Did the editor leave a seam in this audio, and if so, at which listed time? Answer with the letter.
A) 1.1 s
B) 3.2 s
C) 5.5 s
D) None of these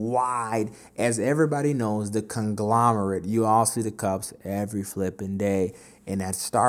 D